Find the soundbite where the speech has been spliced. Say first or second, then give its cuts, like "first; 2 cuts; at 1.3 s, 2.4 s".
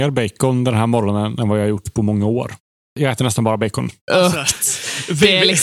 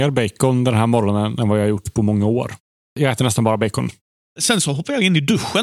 first; 1 cut; at 4.1 s